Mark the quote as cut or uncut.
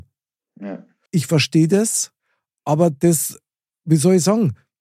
cut